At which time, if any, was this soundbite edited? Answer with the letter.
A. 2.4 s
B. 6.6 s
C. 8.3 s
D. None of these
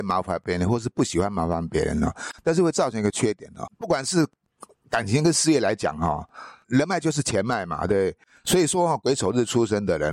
B